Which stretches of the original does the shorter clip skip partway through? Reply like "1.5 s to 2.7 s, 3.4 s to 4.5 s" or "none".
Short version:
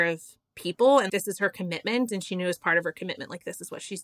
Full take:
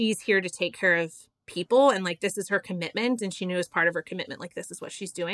2.0 s to 2.2 s